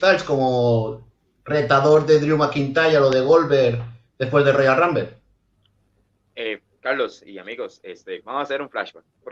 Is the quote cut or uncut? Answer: uncut